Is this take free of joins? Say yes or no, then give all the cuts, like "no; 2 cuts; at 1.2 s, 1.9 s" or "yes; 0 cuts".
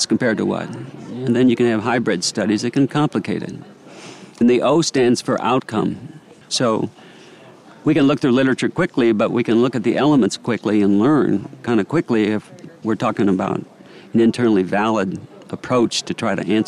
no; 2 cuts; at 4.4 s, 6.4 s